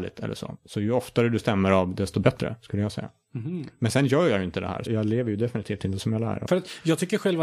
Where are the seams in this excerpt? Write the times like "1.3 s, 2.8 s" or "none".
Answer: 4.9 s, 6.5 s